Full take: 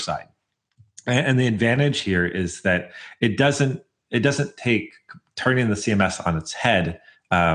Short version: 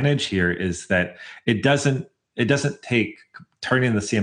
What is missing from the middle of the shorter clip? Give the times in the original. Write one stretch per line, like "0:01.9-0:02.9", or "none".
none